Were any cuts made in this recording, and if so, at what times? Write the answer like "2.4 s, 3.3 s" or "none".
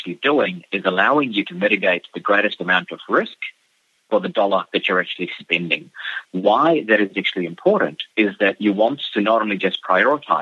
6.2 s, 8.1 s